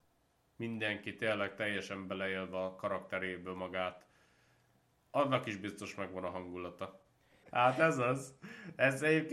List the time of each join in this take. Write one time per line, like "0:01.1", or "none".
0:07.4